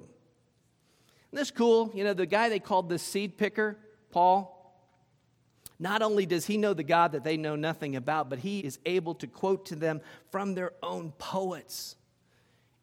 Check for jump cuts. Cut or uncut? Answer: cut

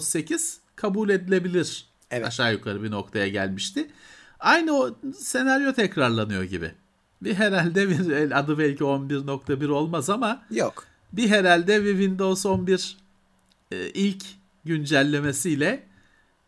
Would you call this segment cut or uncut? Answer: uncut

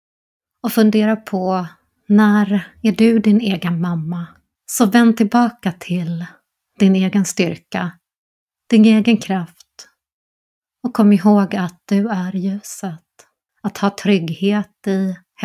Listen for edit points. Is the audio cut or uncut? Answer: cut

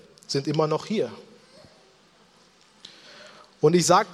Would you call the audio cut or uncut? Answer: uncut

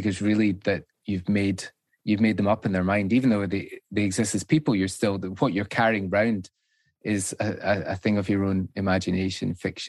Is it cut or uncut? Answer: uncut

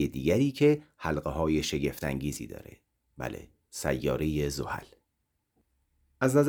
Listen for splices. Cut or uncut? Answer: uncut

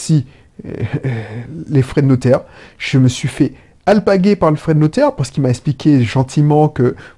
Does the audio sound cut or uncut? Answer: uncut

